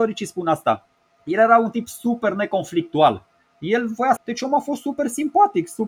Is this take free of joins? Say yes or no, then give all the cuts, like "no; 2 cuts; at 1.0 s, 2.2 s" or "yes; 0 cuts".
no; 1 cut; at 4.2 s